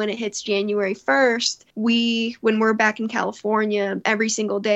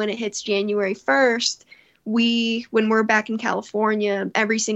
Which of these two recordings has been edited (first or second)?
first